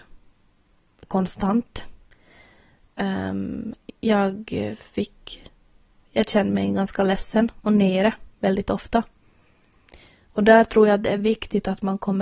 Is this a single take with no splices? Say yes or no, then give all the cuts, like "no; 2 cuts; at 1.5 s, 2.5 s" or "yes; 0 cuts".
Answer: yes; 0 cuts